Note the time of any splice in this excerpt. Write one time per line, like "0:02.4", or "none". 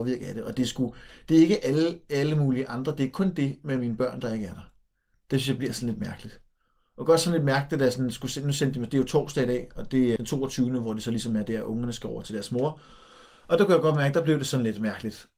0:10.2